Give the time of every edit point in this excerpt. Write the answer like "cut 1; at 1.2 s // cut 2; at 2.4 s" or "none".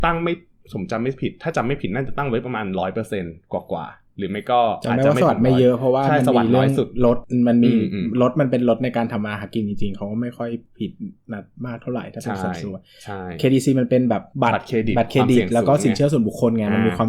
cut 1; at 14.3 s